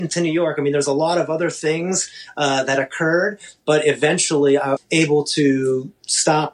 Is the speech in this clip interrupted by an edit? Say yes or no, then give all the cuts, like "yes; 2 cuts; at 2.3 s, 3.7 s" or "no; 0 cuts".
yes; 1 cut; at 4.8 s